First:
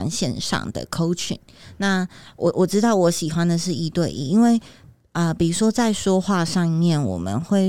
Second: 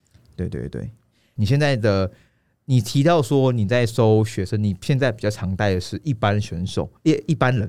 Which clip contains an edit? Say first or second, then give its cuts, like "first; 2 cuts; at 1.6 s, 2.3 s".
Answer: second; 1 cut; at 1.4 s